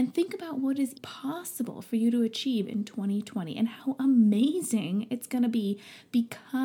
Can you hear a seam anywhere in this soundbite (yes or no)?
yes